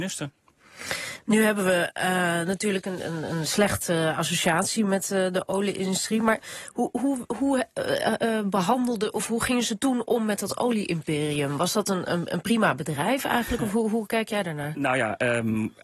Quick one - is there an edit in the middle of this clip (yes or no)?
no